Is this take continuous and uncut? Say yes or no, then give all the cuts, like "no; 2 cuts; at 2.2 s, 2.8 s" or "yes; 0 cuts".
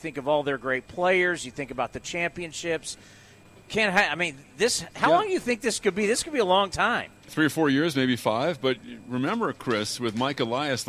yes; 0 cuts